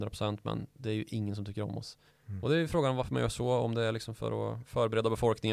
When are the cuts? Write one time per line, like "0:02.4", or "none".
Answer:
0:02.1